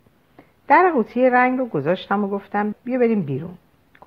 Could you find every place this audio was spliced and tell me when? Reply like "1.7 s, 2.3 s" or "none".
2.7 s